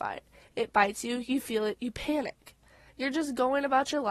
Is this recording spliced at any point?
yes; 1 cut; at 2.9 s

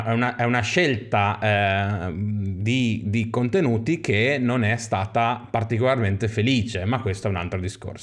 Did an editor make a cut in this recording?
no; 0 cuts

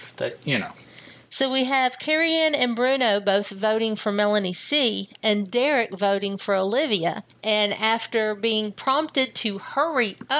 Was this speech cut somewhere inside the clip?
no; 0 cuts

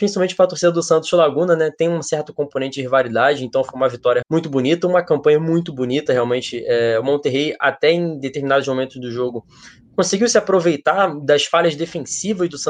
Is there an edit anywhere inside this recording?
yes; 1 cut; at 4.2 s

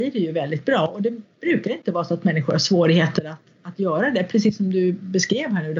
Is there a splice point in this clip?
no; 0 cuts

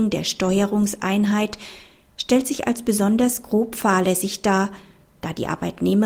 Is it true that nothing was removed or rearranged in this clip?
yes; 0 cuts

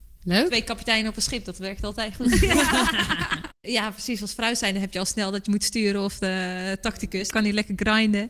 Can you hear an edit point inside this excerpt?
yes; 2 cuts; at 3.5 s, 7.3 s

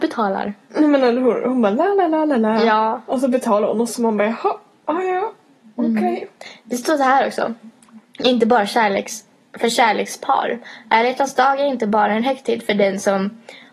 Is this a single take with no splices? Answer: yes; 0 cuts

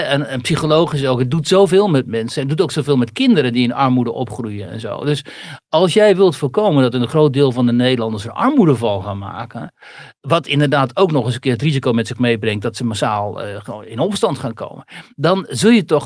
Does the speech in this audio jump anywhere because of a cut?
no; 0 cuts

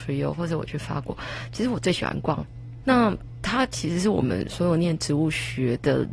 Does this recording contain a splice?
yes; 1 cut; at 2.8 s

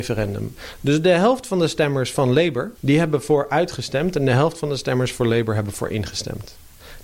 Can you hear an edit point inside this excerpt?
yes; 1 cut; at 2.7 s

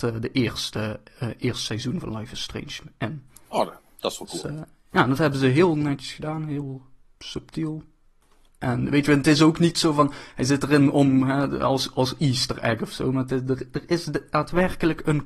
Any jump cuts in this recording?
no; 0 cuts

